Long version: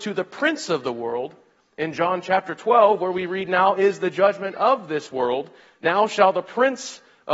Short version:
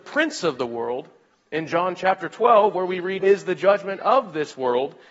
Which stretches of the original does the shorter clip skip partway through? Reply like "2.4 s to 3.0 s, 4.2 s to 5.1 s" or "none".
3.5 s to 3.7 s